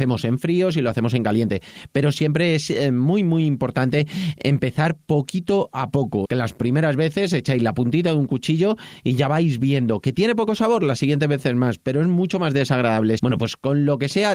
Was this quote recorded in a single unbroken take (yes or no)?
no